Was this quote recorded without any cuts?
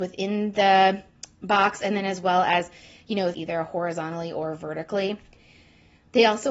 no; 1 cut; at 3.3 s

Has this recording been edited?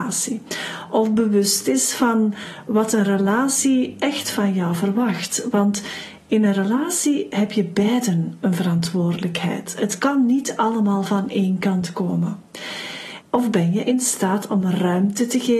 yes; 1 cut; at 13.2 s

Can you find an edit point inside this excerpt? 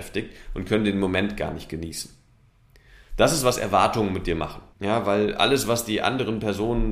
yes; 1 cut; at 4.7 s

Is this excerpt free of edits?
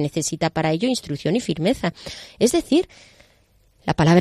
yes; 0 cuts

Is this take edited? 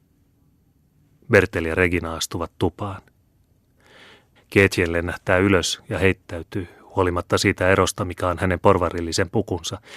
yes; 2 cuts; at 1.2 s, 4.4 s

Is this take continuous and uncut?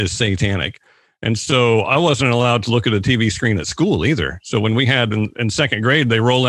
yes; 0 cuts

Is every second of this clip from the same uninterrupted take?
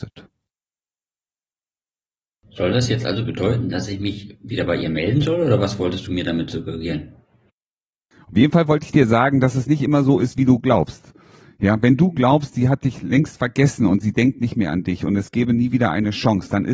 yes; 0 cuts

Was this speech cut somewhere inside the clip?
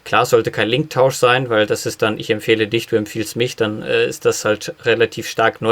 no; 0 cuts

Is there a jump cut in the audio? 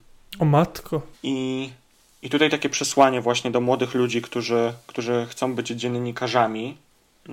yes; 1 cut; at 1.1 s

